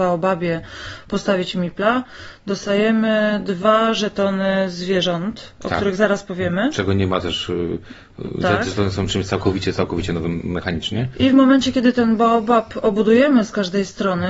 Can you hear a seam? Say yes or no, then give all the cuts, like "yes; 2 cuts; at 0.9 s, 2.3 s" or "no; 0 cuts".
no; 0 cuts